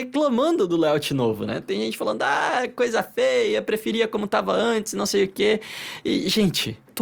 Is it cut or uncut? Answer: uncut